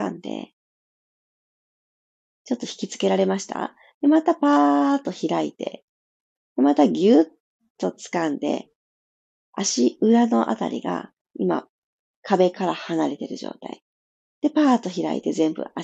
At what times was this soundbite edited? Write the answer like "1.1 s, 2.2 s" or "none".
none